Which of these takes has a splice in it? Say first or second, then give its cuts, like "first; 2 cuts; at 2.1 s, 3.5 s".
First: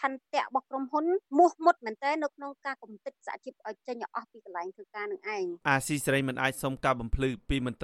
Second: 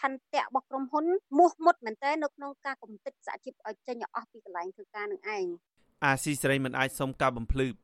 first; 1 cut; at 5.6 s